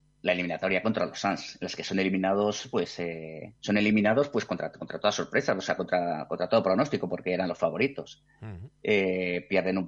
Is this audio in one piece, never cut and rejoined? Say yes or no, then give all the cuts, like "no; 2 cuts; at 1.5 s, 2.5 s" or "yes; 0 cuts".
no; 1 cut; at 3.6 s